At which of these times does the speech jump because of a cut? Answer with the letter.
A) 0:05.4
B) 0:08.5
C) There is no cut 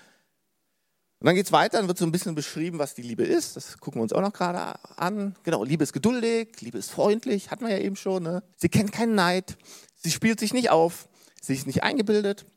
B